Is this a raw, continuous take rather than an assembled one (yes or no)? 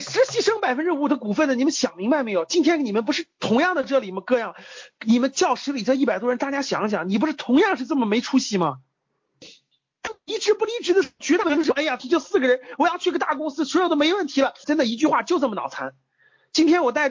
no